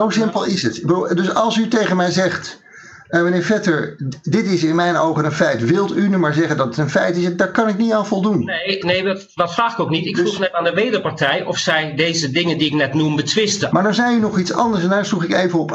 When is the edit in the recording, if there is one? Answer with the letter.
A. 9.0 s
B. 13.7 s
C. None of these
B